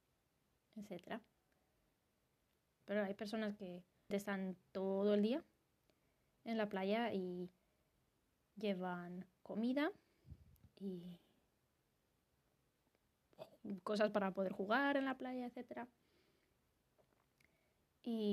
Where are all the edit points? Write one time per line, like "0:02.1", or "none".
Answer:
0:02.8
0:04.1